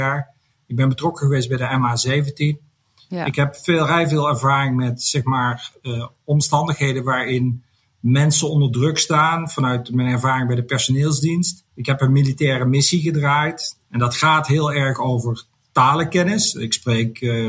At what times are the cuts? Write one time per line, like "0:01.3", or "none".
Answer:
0:11.7
0:13.8